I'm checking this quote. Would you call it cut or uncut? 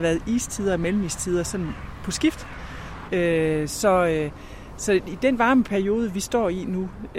cut